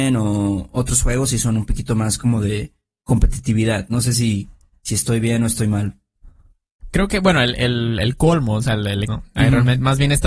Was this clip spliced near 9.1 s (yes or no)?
yes